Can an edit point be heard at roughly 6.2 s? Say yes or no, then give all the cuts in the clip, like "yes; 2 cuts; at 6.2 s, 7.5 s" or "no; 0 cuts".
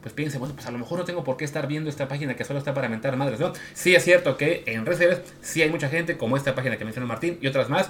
no; 1 cut; at 3.7 s